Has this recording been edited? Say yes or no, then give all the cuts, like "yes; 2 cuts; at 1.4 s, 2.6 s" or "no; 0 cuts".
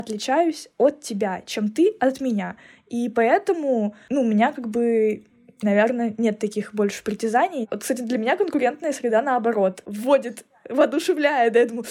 no; 0 cuts